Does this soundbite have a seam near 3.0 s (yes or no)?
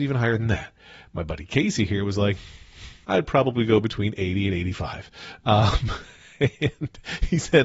yes